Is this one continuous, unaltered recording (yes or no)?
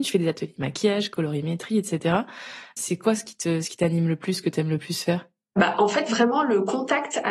yes